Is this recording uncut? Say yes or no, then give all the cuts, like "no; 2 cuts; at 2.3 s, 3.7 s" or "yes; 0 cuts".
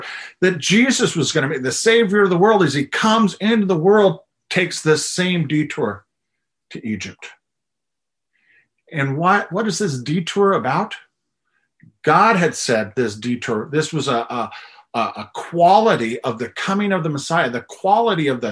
yes; 0 cuts